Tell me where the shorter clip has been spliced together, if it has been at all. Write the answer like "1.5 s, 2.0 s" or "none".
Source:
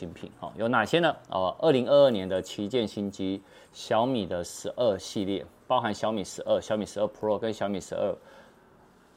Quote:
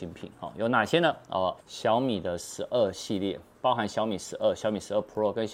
1.6 s